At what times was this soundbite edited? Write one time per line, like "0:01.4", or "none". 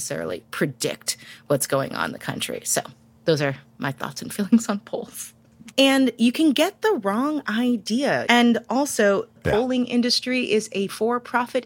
0:05.7
0:08.3
0:09.4

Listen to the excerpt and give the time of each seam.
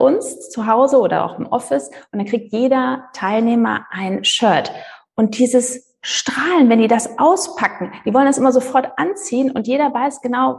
none

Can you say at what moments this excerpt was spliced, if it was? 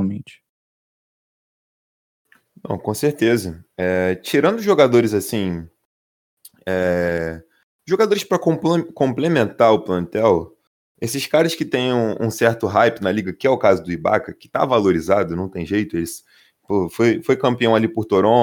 none

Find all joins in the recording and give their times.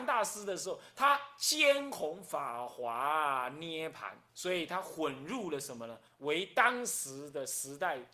0:04.3
0:06.1

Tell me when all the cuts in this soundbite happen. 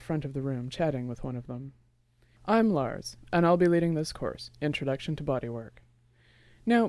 0:02.4

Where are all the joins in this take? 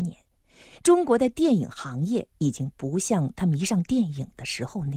0:02.3

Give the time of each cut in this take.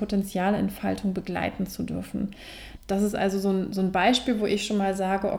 0:02.8

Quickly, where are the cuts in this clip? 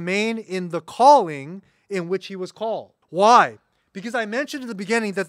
0:03.0

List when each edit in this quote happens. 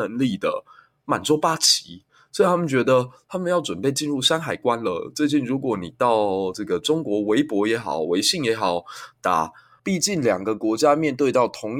0:09.8

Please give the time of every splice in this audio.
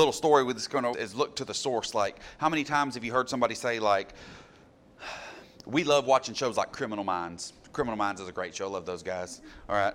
0:00.9

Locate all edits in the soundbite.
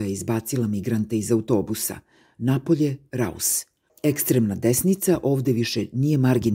0:03.9

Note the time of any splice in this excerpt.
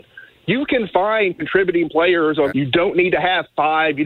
0:02.5

